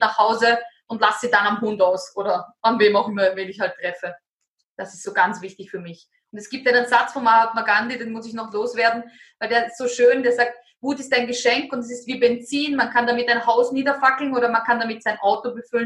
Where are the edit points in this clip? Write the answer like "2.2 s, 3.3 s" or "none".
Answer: none